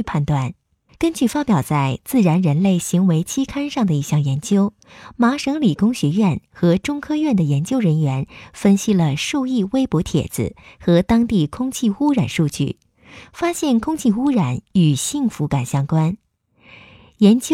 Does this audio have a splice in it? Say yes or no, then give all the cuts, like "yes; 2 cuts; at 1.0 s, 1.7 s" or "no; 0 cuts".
yes; 1 cut; at 0.9 s